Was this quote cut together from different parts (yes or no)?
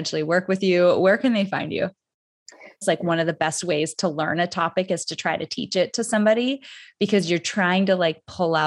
yes